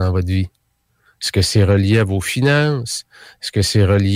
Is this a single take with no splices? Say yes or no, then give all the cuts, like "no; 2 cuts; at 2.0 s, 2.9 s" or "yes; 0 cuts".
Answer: yes; 0 cuts